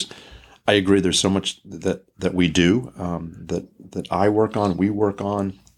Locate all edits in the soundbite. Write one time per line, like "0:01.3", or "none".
none